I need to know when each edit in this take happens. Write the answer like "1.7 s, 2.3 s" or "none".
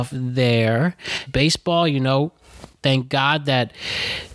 1.3 s